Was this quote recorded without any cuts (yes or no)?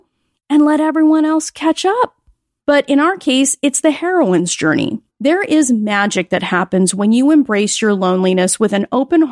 no